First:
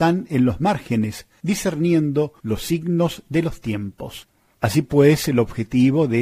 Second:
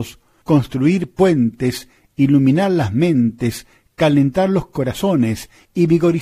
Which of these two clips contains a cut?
first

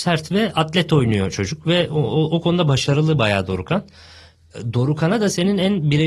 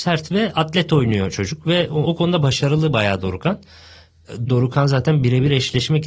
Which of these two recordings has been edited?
second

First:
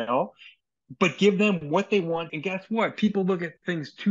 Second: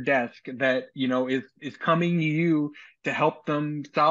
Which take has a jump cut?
first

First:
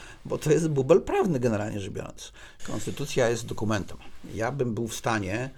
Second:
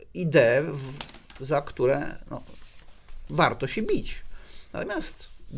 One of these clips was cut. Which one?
first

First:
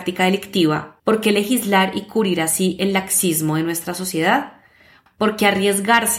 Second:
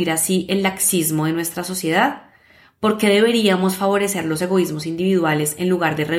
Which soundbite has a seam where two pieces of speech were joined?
first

